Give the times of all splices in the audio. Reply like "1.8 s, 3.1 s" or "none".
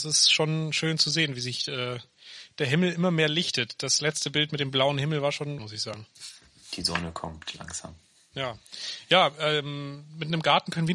5.6 s